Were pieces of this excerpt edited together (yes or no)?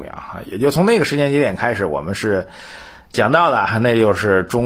no